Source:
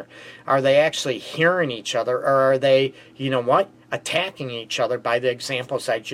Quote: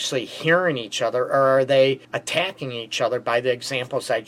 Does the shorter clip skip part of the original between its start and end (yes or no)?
yes